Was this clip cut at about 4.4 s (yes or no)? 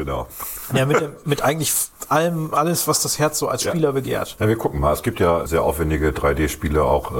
yes